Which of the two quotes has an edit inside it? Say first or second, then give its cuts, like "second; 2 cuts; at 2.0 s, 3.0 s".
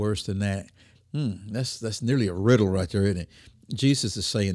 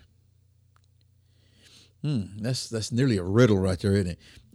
first; 1 cut; at 0.9 s